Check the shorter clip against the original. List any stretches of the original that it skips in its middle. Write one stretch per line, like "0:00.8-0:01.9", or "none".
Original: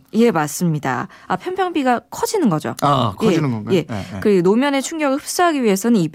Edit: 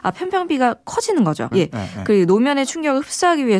0:02.8-0:03.7